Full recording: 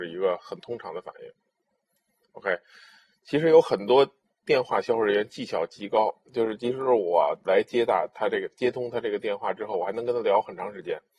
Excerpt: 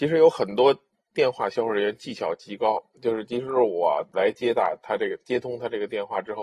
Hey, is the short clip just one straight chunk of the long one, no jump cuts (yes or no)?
yes